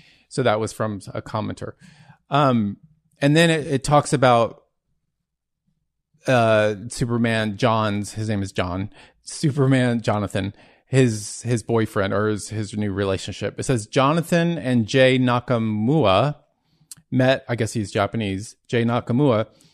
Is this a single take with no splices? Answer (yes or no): yes